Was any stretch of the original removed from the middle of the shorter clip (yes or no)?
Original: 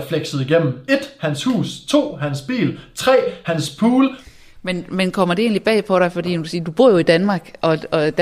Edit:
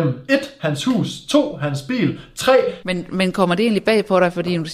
yes